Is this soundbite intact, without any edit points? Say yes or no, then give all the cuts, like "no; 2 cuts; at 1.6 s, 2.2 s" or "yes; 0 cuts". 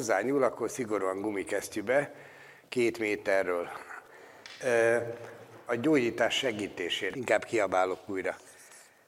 no; 2 cuts; at 5.7 s, 7.1 s